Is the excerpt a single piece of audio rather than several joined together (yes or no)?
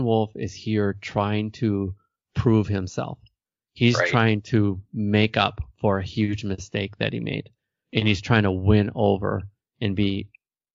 yes